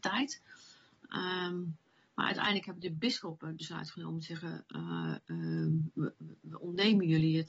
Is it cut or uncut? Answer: uncut